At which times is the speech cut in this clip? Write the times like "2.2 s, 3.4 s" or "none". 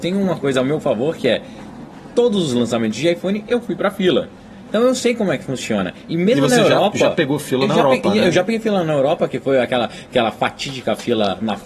none